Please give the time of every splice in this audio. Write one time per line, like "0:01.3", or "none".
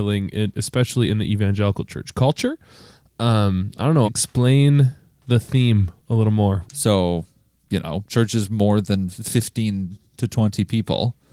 0:04.0
0:06.6